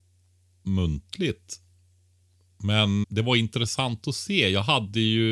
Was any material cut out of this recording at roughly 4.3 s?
no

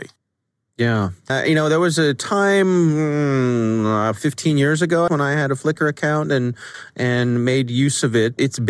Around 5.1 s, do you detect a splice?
yes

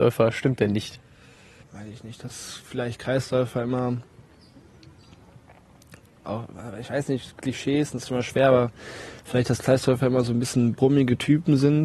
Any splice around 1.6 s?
yes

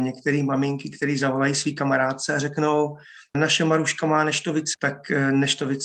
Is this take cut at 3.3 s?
yes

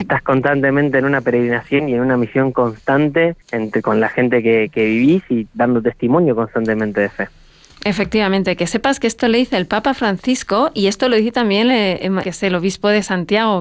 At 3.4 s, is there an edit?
yes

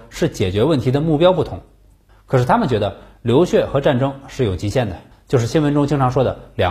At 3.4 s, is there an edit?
no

